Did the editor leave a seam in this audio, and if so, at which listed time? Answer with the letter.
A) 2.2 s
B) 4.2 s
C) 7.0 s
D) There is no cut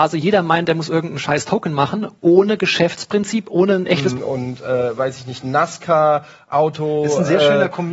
B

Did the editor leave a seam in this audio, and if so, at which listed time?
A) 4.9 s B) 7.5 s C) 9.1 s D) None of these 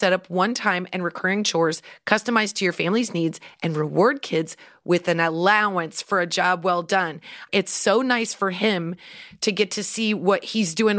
B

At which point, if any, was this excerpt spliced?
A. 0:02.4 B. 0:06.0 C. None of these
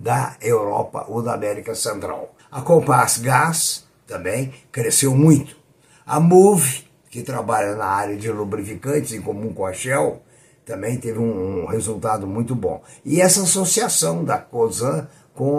A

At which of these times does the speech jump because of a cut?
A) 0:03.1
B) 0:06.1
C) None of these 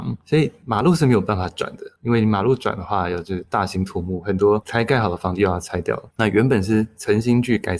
B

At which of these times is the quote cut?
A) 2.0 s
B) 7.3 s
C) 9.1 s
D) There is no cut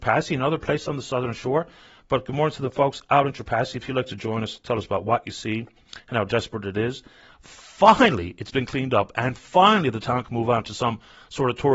B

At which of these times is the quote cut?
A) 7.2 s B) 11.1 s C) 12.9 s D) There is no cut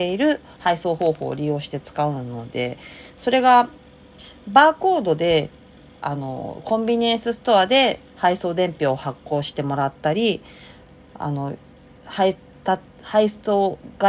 D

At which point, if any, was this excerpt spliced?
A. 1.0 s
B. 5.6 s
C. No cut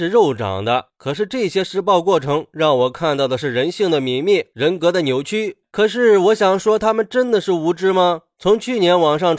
B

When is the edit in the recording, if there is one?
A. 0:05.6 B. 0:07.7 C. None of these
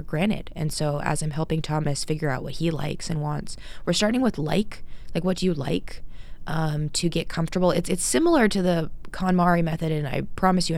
C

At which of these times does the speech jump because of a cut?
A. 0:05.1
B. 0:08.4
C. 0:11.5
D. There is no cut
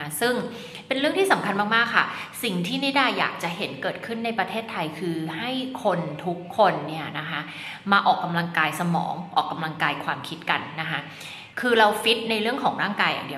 C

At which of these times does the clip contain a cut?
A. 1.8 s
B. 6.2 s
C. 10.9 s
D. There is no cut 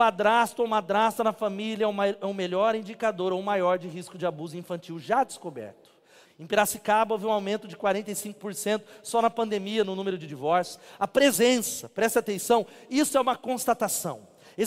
B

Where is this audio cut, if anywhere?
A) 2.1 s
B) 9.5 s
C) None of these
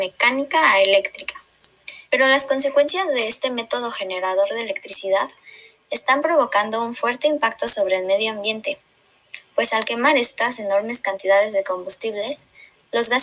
A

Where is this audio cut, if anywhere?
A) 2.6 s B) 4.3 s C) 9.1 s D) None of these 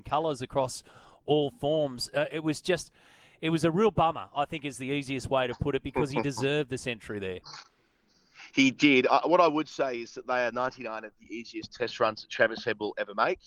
D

